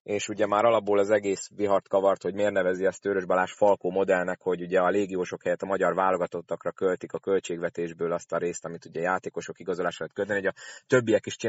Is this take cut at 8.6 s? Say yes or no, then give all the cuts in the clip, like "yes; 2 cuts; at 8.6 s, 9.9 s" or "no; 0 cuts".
no; 0 cuts